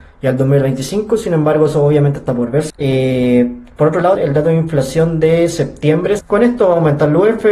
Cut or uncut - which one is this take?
cut